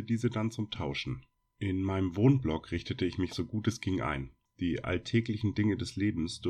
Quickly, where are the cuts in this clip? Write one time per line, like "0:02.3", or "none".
none